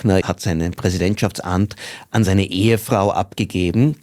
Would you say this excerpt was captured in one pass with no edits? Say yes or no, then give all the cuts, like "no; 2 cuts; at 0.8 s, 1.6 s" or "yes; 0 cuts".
yes; 0 cuts